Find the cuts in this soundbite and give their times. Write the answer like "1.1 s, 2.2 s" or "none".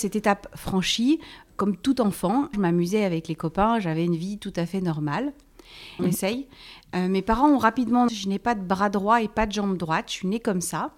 2.5 s, 6.0 s, 8.1 s